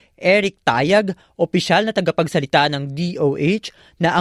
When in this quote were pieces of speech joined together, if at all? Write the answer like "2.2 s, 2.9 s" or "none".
none